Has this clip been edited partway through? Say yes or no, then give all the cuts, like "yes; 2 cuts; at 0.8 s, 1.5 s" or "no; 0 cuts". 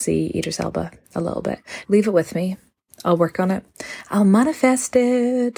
yes; 1 cut; at 1.8 s